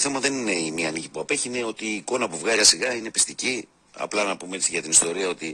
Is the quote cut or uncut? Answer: cut